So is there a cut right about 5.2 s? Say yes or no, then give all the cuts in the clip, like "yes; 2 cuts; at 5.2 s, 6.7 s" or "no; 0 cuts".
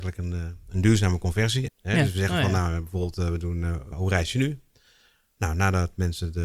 no; 2 cuts; at 1.7 s, 3.9 s